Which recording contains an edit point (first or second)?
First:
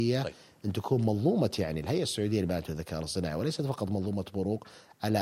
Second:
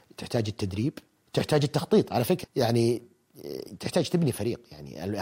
second